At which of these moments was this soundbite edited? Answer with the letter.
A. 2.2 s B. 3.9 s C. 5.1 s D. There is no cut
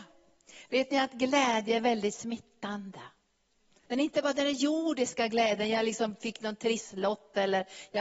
B